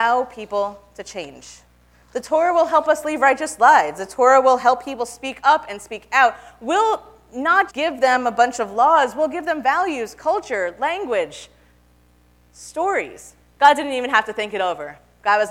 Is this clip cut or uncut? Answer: cut